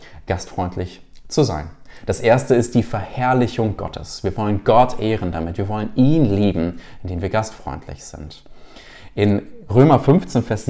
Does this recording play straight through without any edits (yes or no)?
yes